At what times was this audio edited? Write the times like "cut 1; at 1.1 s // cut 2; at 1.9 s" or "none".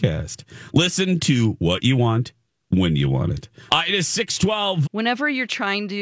cut 1; at 3.7 s // cut 2; at 4.8 s